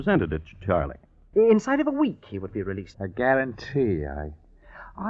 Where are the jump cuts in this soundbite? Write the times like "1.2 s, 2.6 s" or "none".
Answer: 1.3 s, 2.9 s

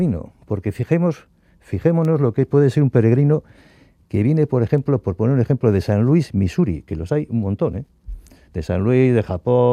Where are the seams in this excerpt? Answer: none

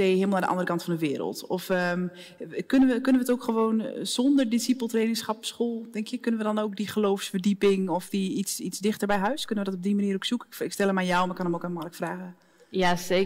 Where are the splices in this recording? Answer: none

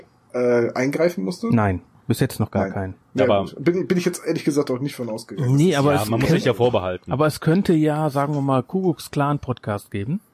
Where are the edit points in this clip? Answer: 3.0 s

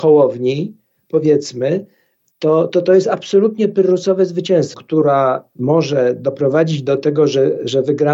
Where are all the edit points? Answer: 4.7 s

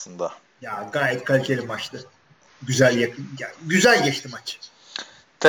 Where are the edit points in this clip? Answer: 2.5 s

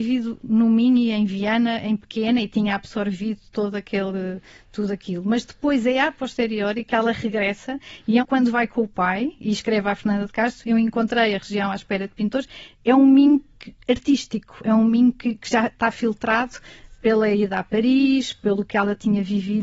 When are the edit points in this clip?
8.2 s

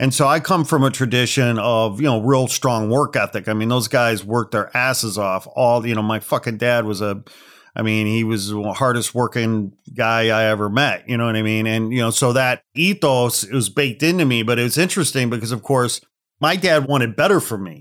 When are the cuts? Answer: none

